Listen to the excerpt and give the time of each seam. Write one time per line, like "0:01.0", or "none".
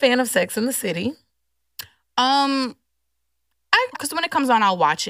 0:03.9